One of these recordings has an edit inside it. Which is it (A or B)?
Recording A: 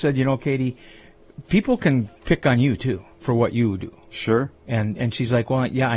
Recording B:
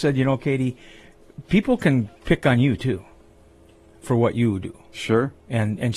A